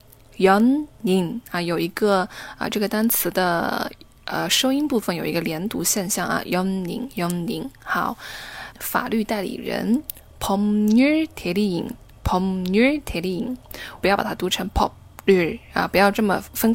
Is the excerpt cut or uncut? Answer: cut